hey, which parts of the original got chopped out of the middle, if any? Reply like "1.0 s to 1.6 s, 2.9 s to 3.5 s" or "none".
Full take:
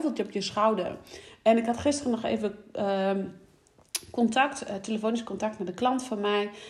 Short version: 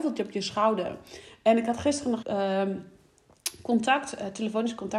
2.2 s to 2.7 s